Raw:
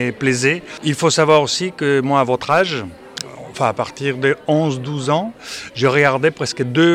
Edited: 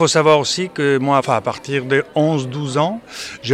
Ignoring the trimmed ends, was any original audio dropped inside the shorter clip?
yes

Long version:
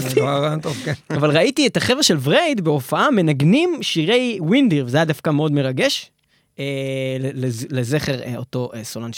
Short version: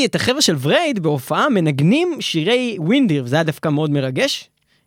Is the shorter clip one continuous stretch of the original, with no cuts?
yes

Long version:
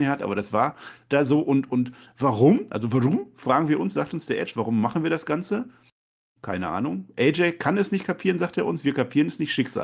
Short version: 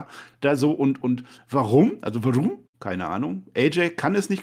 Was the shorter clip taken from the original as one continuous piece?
no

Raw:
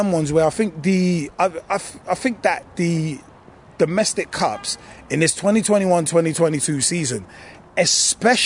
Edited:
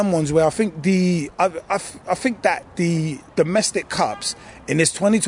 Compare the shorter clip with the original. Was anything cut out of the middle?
yes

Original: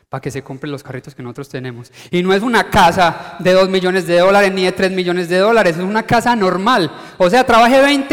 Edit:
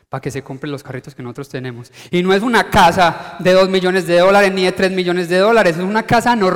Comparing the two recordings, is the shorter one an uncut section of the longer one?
yes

